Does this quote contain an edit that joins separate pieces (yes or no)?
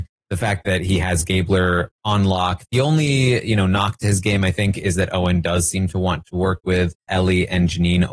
yes